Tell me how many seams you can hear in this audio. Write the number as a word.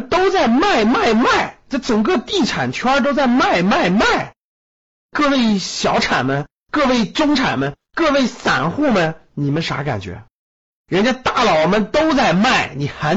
one